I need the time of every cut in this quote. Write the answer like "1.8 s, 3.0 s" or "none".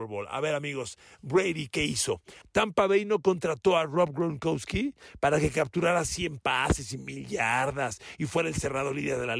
2.4 s

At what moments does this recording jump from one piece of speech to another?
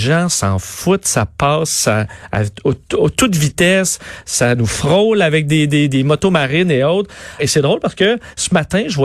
7.4 s

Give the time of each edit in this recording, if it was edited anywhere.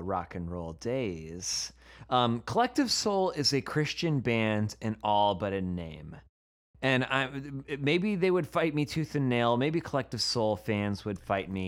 none

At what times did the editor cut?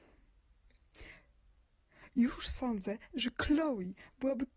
none

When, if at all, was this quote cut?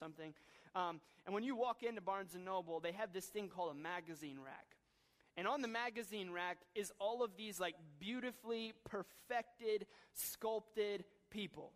none

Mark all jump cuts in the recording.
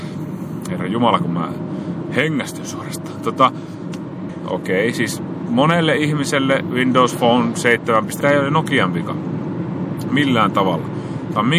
4.3 s, 8.2 s

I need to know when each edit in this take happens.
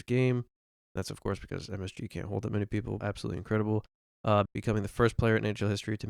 3.0 s, 4.5 s

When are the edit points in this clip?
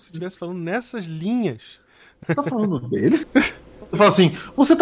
2.2 s, 3.2 s

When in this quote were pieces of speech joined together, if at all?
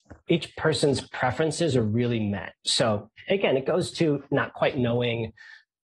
2.6 s

